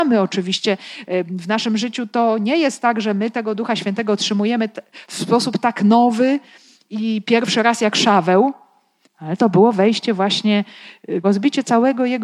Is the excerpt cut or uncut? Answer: cut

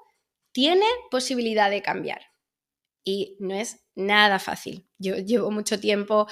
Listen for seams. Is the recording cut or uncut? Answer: uncut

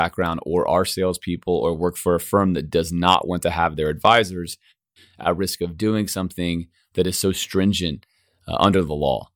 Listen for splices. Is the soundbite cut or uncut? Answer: uncut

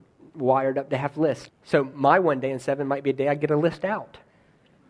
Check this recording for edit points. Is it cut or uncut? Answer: cut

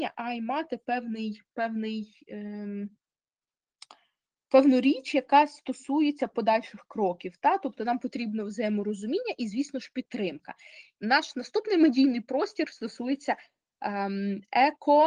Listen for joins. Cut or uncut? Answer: cut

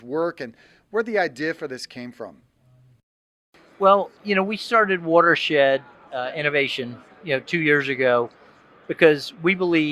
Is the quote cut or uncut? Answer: uncut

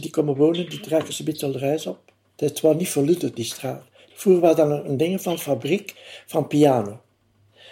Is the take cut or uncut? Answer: cut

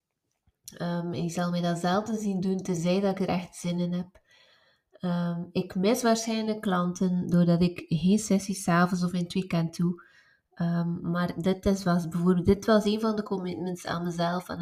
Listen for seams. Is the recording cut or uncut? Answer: uncut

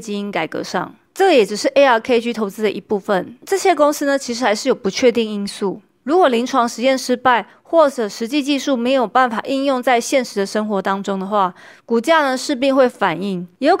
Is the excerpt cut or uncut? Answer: uncut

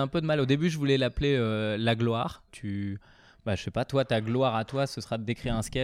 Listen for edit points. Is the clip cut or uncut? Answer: cut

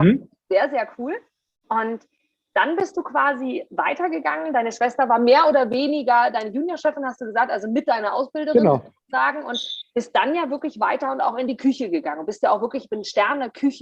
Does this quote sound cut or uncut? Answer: uncut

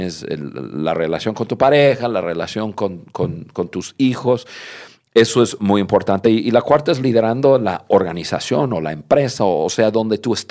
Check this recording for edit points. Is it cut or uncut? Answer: uncut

